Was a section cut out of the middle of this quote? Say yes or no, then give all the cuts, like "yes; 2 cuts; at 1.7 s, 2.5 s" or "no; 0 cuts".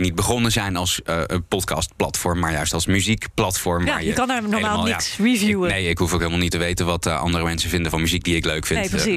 no; 0 cuts